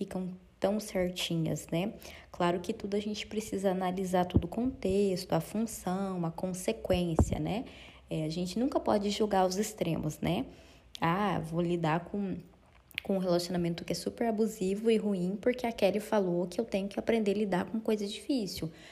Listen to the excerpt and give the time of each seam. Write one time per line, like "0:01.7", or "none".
none